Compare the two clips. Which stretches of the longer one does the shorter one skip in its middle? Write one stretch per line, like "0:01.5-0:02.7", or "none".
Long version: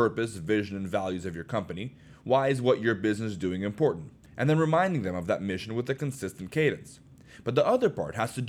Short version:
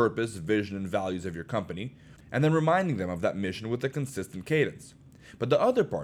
0:02.2-0:04.2